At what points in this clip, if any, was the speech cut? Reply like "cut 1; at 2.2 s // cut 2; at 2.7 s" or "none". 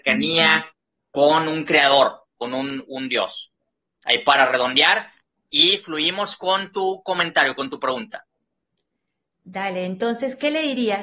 none